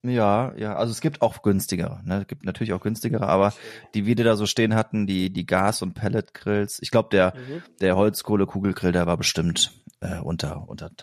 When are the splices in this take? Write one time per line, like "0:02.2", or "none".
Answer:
none